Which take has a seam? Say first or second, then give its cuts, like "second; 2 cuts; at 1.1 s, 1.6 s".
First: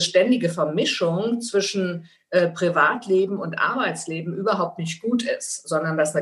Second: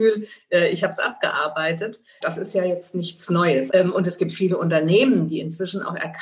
second; 2 cuts; at 2.2 s, 3.7 s